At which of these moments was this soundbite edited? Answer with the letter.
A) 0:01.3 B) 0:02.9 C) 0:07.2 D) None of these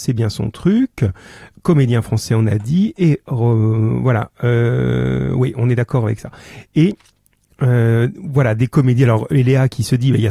D